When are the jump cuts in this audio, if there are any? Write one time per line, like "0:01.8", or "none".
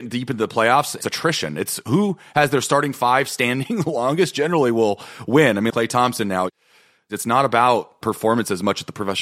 0:05.7